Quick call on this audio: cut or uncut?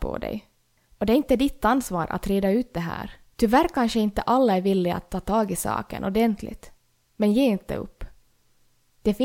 cut